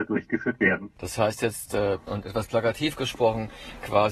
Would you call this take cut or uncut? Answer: cut